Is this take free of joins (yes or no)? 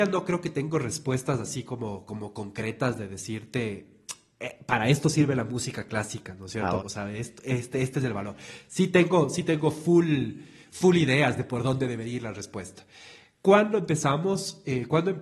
no